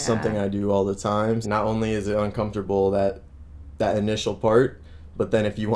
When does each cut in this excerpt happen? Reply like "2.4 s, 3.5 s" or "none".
1.4 s